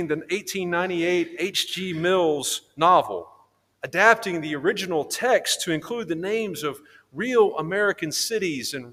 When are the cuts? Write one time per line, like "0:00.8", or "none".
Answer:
0:03.7